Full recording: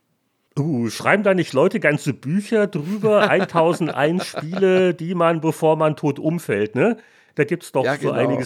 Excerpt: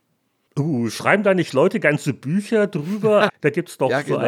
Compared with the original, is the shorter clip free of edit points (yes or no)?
no